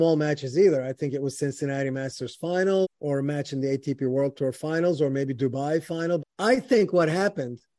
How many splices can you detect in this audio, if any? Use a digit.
2